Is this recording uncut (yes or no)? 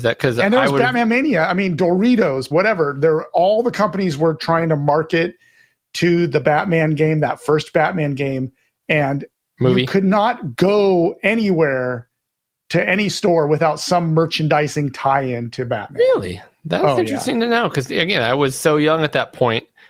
no